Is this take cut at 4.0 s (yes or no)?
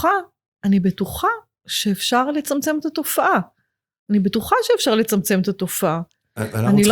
no